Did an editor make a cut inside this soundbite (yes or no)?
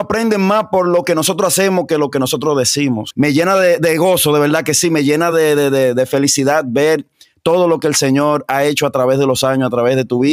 no